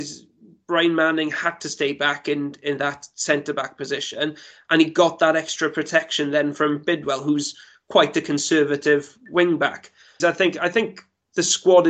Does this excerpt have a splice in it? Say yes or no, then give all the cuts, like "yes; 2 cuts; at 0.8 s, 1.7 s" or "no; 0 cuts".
yes; 1 cut; at 10.2 s